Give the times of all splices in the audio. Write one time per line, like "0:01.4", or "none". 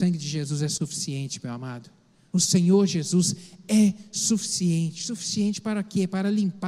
0:02.3

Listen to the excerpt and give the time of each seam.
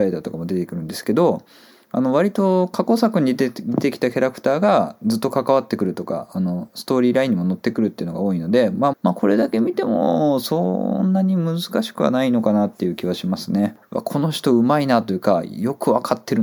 0:08.9
0:13.8

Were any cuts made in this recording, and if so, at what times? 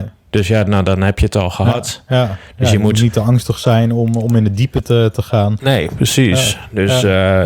none

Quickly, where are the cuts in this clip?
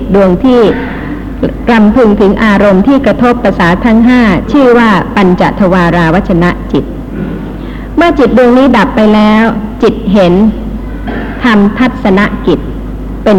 0:03.8

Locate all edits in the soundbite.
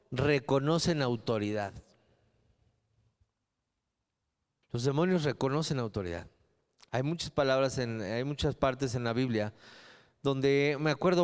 none

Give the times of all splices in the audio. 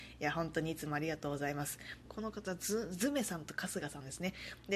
0:02.0

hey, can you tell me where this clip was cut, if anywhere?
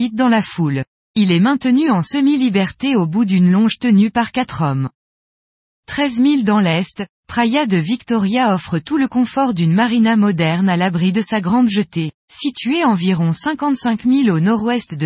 0:12.2

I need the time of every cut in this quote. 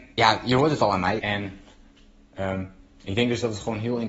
0:01.2

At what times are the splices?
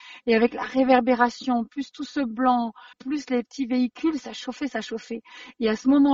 none

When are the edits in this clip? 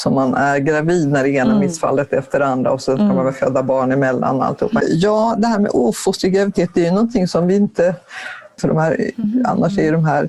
0:04.8
0:08.6

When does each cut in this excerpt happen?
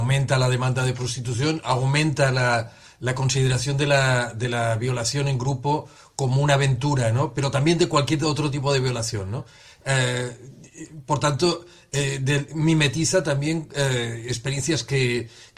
0:12.5

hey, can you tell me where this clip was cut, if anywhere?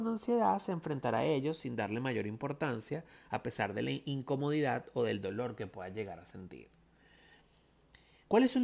none

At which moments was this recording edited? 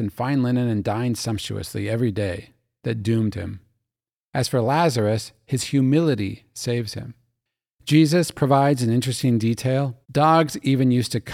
0:10.0

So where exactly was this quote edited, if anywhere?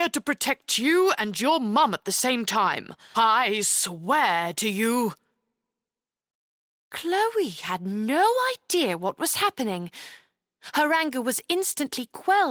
0:03.1

